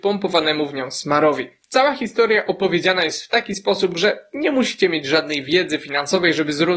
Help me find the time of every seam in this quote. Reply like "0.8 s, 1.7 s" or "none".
none

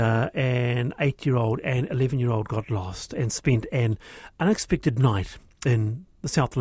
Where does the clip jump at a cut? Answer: none

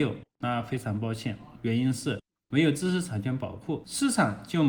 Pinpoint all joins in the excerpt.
1.5 s

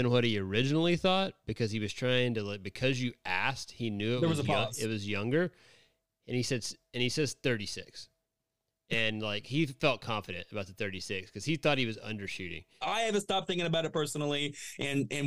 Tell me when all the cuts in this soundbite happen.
12.8 s

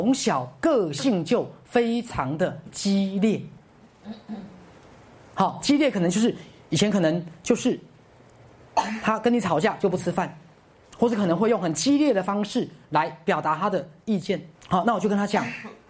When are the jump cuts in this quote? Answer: 14.6 s

